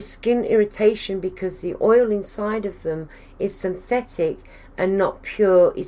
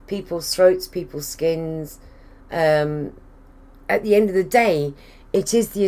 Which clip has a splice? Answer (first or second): second